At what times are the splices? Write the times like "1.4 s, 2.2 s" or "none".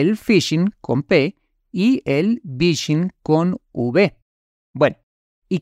none